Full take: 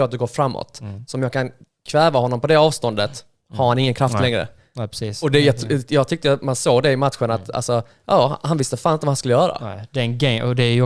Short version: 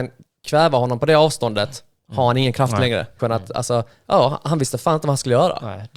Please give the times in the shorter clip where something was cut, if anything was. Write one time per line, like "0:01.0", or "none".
0:03.2